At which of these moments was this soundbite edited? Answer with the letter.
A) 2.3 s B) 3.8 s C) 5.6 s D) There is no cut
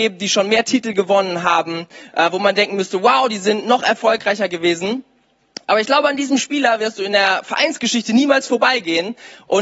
D